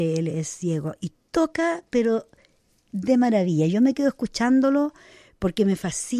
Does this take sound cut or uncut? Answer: uncut